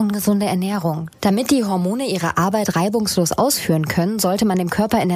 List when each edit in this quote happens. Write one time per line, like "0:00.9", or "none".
0:01.1